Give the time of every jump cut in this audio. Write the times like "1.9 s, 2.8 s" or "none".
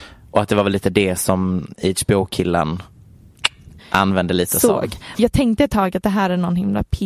3.8 s, 5.2 s